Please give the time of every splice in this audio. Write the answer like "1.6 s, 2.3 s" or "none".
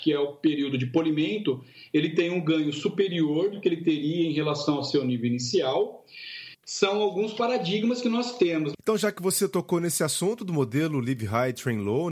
6.5 s, 8.7 s